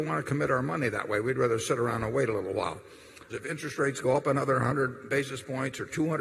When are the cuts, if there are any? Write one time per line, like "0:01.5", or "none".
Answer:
0:03.3